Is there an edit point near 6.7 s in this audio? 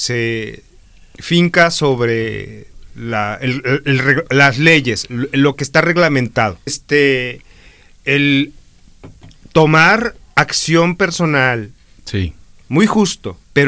yes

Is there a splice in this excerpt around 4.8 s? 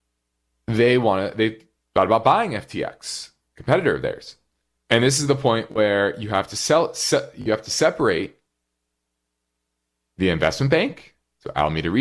yes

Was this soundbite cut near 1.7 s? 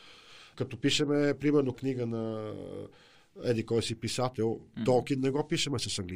yes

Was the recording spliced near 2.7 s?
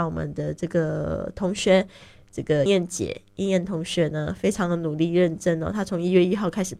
yes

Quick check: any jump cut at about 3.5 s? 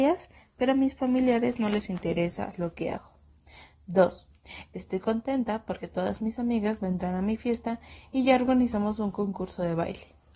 no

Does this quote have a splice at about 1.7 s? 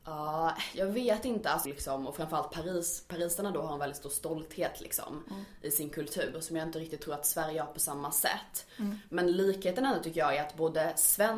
yes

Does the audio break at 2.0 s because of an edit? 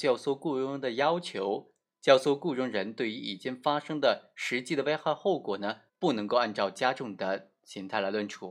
no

